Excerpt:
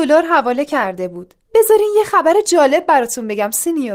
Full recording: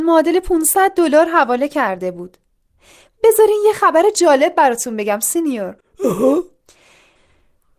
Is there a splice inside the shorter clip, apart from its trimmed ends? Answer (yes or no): yes